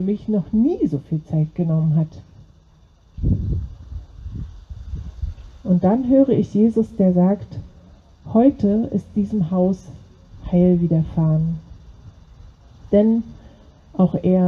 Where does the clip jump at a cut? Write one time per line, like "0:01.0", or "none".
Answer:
none